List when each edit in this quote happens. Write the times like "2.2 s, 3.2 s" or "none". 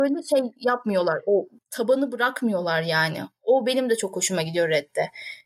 1.6 s